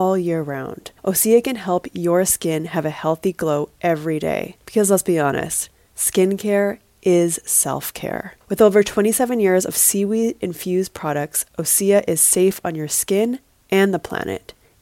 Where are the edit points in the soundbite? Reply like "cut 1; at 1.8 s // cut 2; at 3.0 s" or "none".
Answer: cut 1; at 1.0 s // cut 2; at 4.6 s // cut 3; at 8.4 s